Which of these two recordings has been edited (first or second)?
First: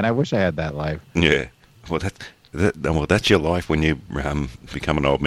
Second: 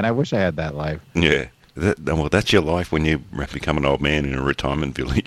second